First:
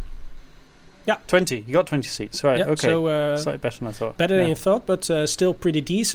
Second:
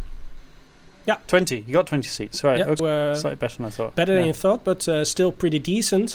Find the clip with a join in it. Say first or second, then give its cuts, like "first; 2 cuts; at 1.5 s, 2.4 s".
second; 1 cut; at 2.8 s